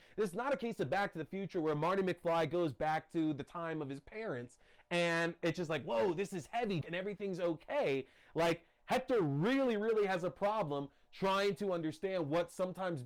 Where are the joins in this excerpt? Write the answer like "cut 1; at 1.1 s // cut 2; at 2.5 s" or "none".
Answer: cut 1; at 6.8 s